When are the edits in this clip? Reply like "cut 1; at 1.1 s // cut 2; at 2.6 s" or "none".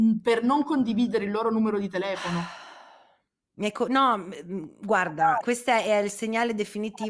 cut 1; at 5.4 s